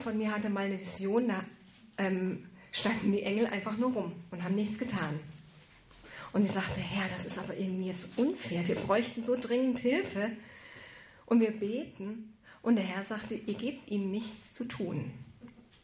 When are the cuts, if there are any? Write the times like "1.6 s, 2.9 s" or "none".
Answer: none